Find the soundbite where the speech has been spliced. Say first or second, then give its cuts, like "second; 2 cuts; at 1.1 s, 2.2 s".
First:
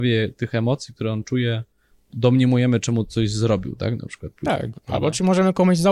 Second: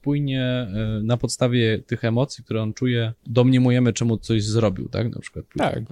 second; 1 cut; at 3.2 s